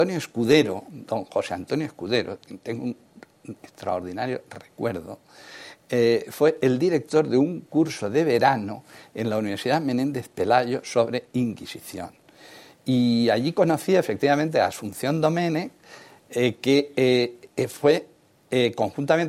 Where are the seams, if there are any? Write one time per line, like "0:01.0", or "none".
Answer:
none